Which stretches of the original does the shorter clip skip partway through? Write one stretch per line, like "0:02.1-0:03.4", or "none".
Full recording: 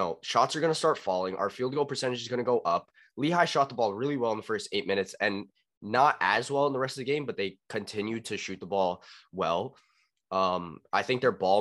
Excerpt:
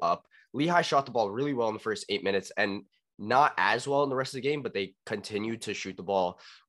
none